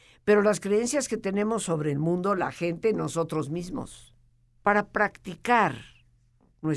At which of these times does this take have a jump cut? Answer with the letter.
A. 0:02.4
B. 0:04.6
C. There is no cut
B